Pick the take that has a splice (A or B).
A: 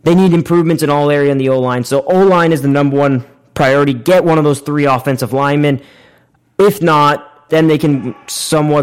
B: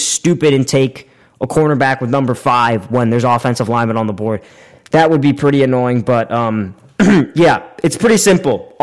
A